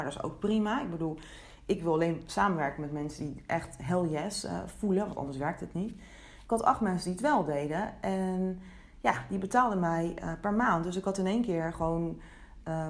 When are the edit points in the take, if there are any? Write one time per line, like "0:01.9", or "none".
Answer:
none